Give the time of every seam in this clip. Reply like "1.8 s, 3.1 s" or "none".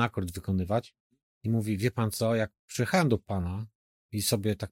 1.3 s